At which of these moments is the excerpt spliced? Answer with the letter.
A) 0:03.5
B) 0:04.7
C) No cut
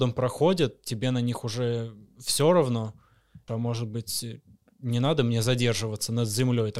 A